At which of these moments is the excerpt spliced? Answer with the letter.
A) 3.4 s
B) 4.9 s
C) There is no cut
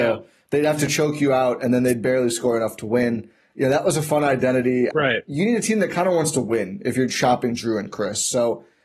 B